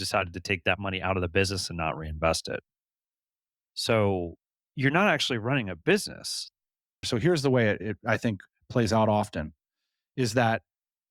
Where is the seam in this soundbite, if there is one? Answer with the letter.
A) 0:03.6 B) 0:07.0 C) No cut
B